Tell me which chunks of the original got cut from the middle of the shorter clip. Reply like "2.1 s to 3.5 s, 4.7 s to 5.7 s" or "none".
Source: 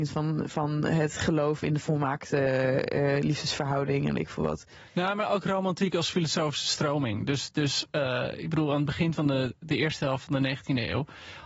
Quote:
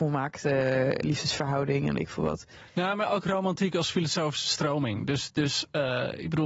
2.9 s to 3.2 s